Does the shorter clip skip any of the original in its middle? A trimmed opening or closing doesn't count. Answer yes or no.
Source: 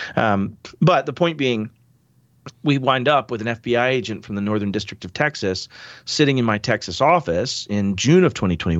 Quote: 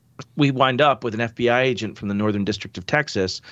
no